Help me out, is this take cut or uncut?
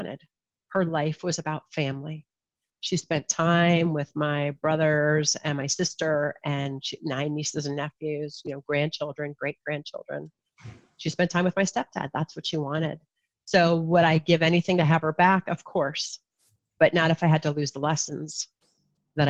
uncut